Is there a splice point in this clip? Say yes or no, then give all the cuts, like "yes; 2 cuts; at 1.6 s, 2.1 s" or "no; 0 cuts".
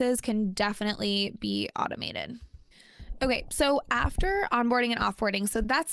no; 0 cuts